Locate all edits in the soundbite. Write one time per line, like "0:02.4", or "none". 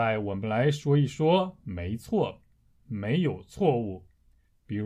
0:02.8